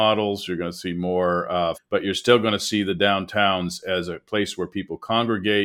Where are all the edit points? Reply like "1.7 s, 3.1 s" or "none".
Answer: 1.7 s